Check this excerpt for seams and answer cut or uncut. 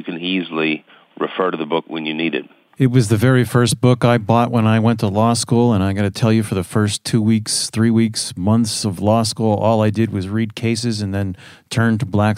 uncut